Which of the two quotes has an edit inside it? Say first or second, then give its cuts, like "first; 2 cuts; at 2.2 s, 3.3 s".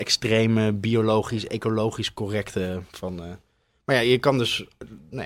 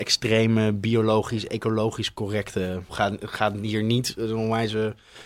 second; 1 cut; at 2.9 s